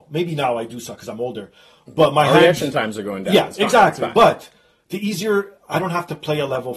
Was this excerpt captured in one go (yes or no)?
yes